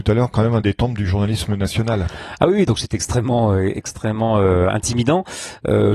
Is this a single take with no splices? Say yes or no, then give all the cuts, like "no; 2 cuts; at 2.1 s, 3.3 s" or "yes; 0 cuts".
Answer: yes; 0 cuts